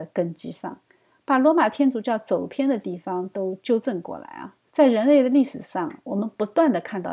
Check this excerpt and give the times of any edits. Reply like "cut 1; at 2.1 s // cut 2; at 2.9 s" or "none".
cut 1; at 4.7 s